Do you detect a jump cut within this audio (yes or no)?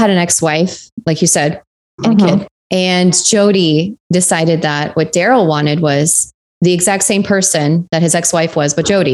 no